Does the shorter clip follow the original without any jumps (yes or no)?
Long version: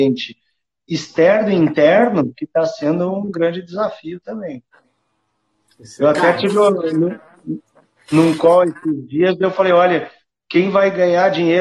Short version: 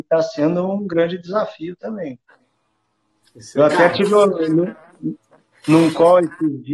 yes